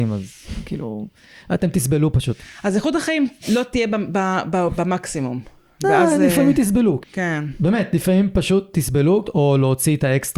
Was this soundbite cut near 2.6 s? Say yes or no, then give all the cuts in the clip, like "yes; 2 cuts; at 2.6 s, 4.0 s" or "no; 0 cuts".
no; 2 cuts; at 7.0 s, 9.2 s